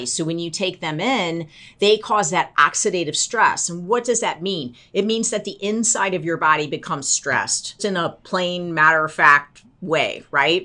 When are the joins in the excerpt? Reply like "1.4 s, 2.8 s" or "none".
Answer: 7.8 s